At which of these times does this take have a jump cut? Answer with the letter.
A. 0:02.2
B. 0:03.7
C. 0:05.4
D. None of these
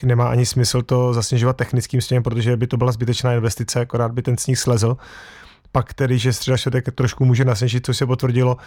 D